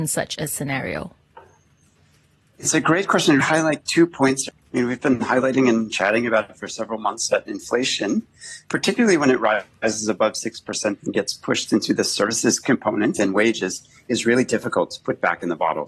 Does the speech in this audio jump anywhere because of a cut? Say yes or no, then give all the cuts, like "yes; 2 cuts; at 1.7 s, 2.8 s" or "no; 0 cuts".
yes; 3 cuts; at 3.4 s, 4.5 s, 7.3 s